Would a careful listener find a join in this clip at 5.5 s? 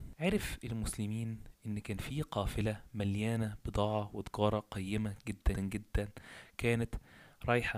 yes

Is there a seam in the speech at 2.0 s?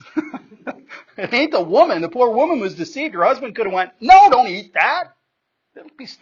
no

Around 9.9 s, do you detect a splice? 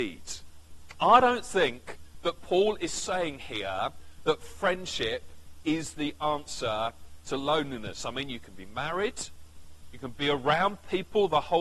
yes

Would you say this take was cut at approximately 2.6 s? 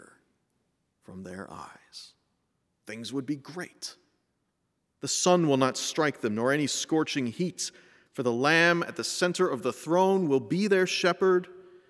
yes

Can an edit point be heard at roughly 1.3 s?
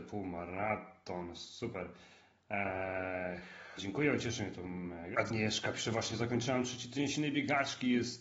no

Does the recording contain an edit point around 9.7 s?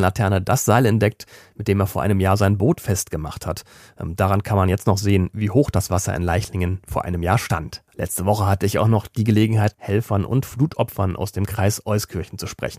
yes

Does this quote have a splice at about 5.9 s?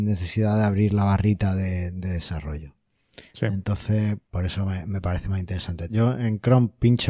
yes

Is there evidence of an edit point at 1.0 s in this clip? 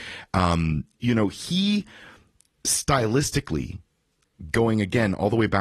yes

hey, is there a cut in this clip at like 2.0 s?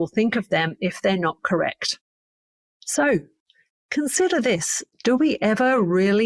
no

